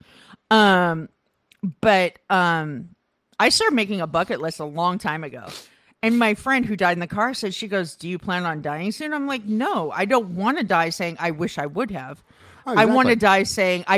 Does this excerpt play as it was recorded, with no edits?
yes; 0 cuts

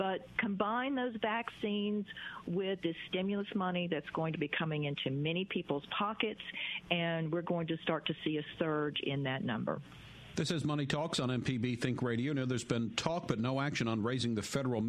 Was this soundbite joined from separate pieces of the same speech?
no; 0 cuts

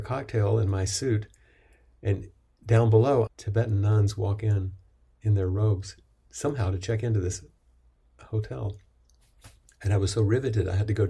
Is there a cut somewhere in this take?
yes; 1 cut; at 3.3 s

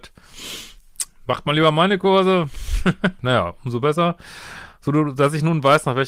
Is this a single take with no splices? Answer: no; 1 cut; at 3.2 s

